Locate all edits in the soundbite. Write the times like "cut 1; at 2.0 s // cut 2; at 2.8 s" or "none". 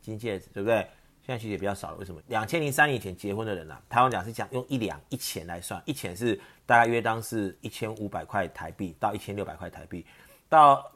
cut 1; at 2.2 s // cut 2; at 3.9 s